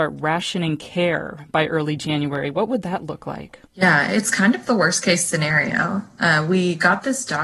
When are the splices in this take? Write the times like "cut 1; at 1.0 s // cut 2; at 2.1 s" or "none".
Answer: cut 1; at 3.6 s

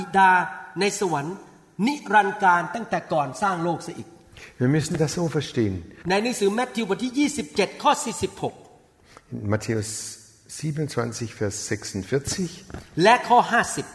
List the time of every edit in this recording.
cut 1; at 6.0 s

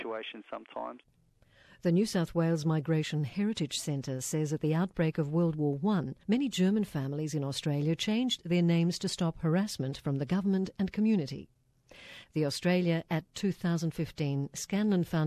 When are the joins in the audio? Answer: cut 1; at 6.2 s // cut 2; at 12.2 s

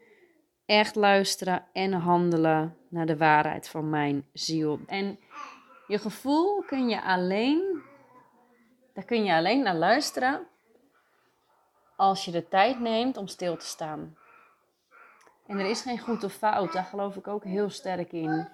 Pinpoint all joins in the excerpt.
cut 1; at 4.9 s // cut 2; at 15.4 s

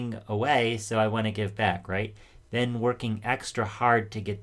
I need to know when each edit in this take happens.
none

